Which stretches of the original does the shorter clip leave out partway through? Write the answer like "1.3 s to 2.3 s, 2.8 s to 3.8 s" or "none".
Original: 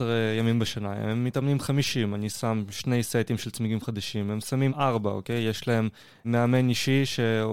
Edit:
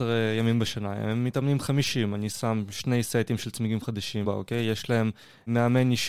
4.2 s to 5.0 s

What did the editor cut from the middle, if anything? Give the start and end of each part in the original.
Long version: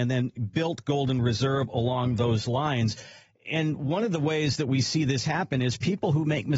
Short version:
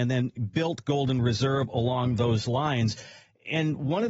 none

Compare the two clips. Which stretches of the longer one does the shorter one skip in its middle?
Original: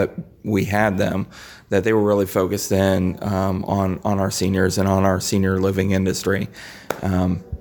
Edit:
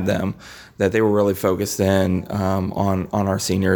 none

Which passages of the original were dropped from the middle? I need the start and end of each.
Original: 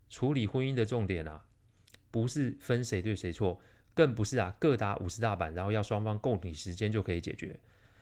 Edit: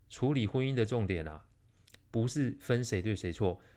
none

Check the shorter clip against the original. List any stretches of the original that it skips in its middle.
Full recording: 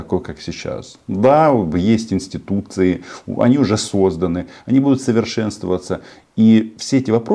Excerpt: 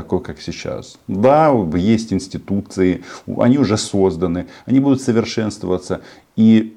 none

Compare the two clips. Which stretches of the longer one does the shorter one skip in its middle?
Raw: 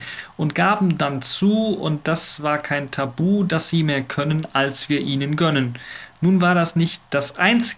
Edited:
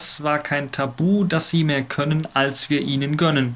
none

